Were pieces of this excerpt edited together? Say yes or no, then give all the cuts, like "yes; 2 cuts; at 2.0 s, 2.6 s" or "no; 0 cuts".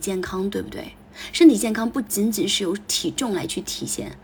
no; 0 cuts